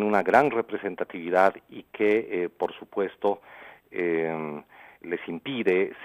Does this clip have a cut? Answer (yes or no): yes